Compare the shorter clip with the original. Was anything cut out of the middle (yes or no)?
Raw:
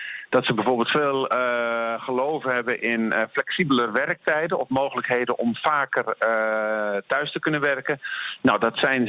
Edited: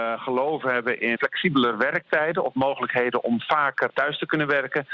yes